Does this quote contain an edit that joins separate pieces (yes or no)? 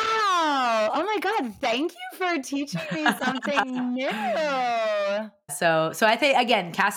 yes